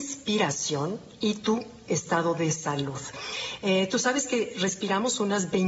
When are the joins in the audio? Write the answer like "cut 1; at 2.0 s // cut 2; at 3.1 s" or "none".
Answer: none